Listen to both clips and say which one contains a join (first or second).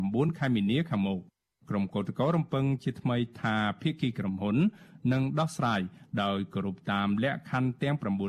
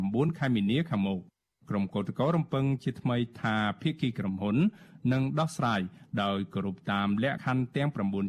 second